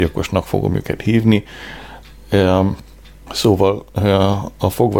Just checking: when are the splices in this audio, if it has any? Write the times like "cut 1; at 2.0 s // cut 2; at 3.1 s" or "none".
cut 1; at 3.3 s